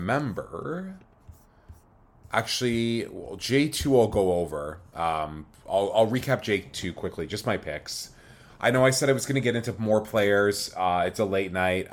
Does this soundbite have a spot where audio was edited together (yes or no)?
no